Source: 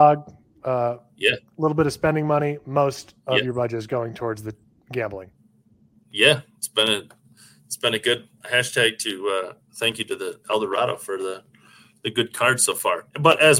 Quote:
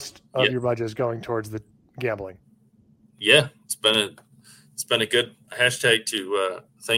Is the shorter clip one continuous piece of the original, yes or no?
yes